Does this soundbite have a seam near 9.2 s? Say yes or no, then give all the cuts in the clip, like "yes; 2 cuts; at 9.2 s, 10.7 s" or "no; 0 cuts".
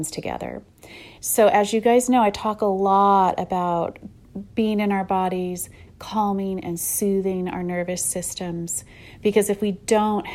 no; 2 cuts; at 1.2 s, 5.9 s